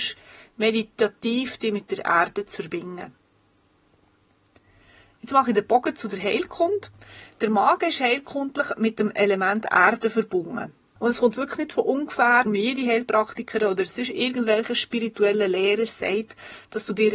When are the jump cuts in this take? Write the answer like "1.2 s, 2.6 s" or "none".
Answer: 11.0 s, 12.5 s